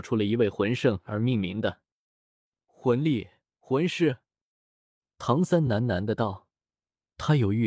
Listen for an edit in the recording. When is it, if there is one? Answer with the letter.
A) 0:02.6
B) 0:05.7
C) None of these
C